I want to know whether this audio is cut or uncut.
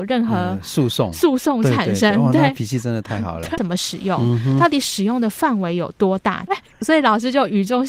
cut